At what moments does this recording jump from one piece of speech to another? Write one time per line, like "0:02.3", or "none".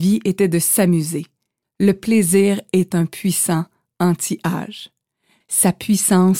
0:01.6
0:05.4